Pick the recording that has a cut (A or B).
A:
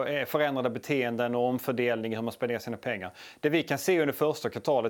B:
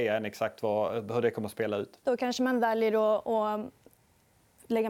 B